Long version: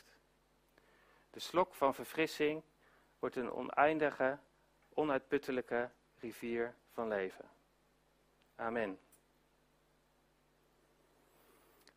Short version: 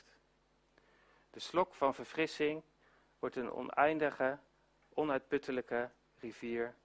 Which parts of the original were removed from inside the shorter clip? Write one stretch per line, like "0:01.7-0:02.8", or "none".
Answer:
none